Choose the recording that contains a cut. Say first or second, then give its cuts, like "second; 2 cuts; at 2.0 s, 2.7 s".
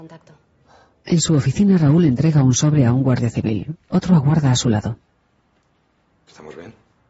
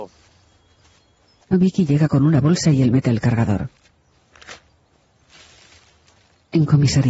second; 1 cut; at 1.4 s